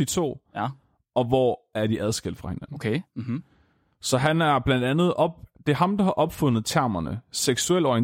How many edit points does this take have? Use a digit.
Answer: 0